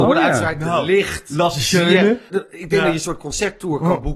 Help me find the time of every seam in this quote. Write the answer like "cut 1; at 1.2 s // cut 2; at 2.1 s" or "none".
cut 1; at 2.3 s